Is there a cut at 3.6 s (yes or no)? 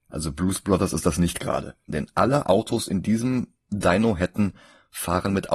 yes